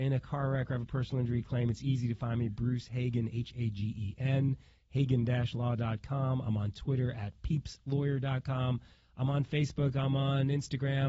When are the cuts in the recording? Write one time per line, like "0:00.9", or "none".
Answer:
none